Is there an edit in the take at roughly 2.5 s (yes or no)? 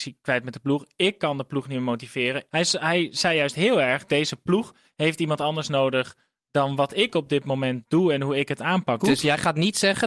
yes